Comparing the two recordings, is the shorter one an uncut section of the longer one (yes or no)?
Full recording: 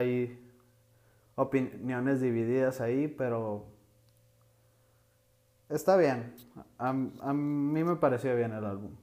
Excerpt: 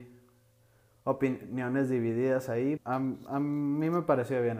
no